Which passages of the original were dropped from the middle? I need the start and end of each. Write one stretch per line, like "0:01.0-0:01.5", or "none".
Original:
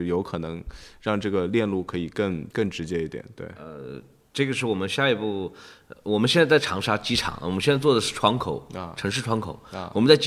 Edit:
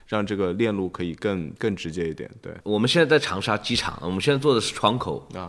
0:03.5-0:06.0